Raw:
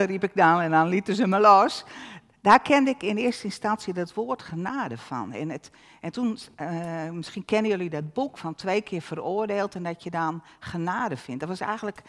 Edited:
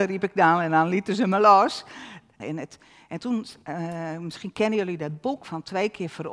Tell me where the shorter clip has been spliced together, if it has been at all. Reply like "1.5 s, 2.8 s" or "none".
2.4 s